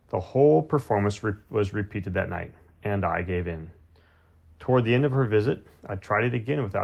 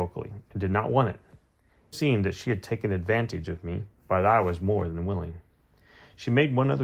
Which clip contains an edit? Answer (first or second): second